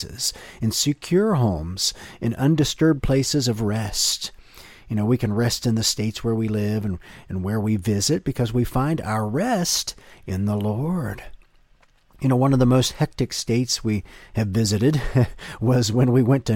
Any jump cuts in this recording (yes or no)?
no